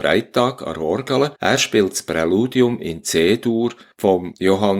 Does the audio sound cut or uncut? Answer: cut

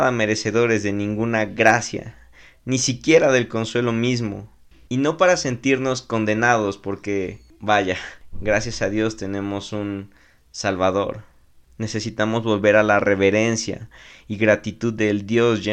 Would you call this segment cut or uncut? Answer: cut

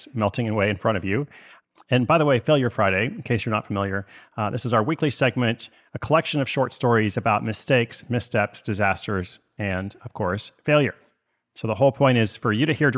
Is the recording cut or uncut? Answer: uncut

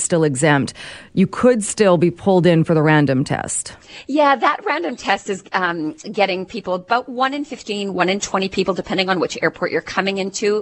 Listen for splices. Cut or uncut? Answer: uncut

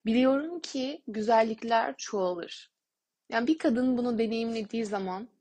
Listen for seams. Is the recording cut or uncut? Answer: uncut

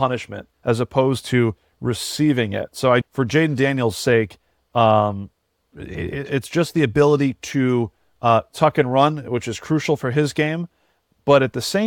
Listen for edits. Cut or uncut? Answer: cut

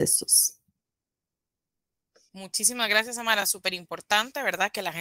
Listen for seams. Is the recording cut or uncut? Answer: uncut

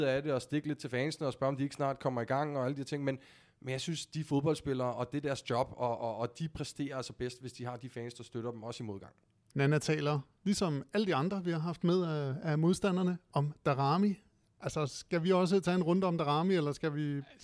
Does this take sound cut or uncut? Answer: cut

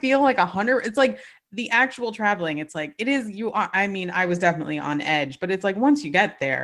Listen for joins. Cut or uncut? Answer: uncut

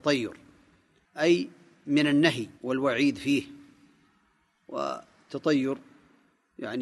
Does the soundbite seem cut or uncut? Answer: cut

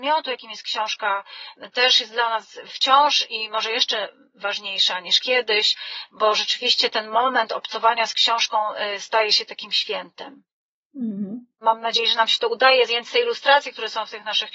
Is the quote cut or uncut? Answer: cut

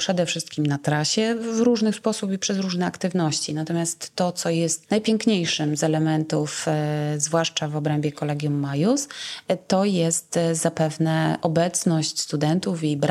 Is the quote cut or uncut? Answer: uncut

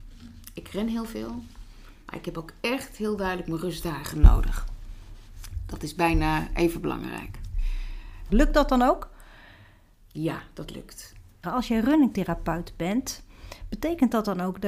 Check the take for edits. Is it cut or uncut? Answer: cut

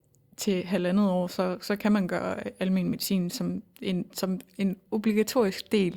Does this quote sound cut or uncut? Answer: uncut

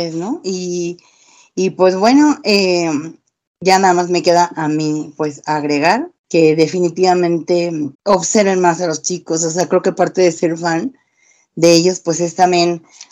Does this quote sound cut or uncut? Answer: cut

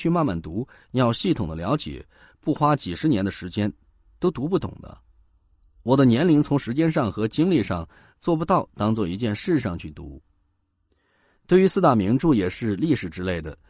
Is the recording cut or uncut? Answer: uncut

